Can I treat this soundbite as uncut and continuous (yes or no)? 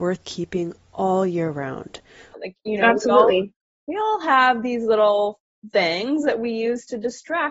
no